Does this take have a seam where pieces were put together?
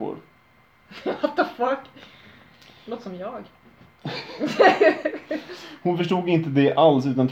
no; 0 cuts

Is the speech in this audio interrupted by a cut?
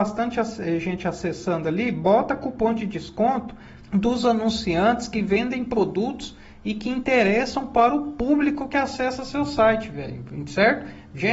yes; 1 cut; at 3.8 s

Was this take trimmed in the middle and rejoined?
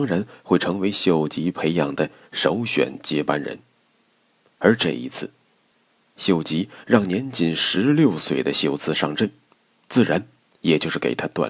no; 0 cuts

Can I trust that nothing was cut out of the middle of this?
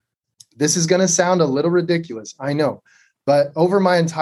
yes; 0 cuts

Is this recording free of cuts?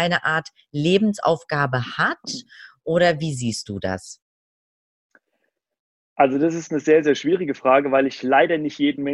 yes; 0 cuts

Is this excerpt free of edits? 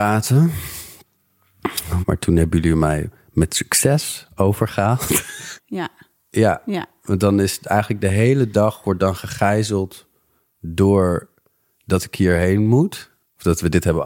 no; 2 cuts; at 2.0 s, 5.6 s

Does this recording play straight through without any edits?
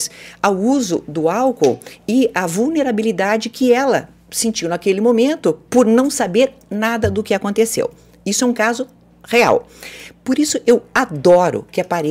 yes; 0 cuts

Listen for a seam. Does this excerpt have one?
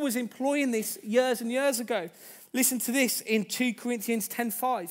no; 0 cuts

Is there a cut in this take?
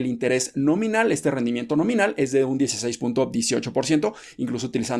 no; 0 cuts

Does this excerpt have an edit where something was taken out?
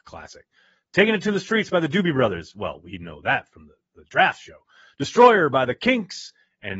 no; 0 cuts

